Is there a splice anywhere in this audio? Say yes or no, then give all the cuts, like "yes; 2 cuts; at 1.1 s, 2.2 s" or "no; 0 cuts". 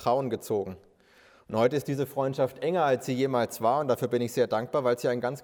no; 0 cuts